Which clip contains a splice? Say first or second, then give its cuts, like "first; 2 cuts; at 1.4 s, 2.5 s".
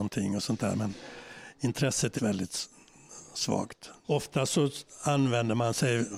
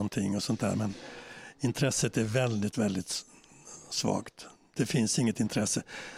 first; 2 cuts; at 2.2 s, 4.0 s